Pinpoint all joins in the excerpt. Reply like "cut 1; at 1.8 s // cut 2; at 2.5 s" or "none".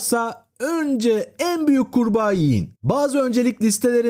cut 1; at 2.7 s